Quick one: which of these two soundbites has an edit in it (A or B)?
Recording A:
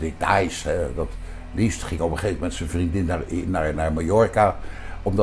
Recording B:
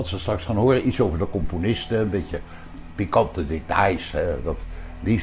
A